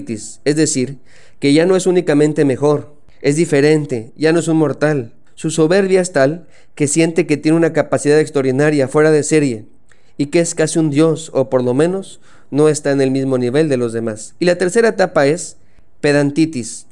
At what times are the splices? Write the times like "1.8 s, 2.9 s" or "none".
none